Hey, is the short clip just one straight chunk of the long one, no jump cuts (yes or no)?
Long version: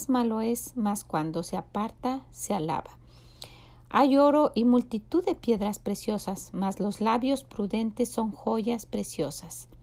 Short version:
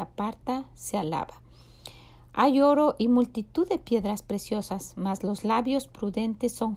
yes